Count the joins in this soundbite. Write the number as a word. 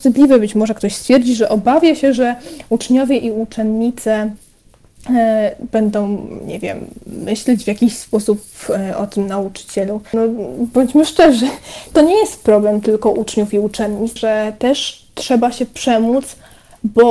three